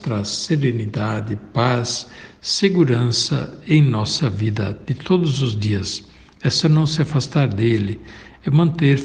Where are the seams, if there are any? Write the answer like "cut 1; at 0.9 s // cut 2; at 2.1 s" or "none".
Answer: none